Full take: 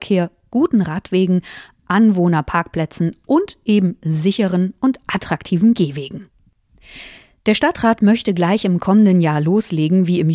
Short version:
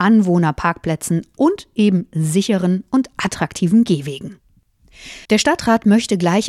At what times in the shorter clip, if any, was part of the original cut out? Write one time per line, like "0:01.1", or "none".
0:05.2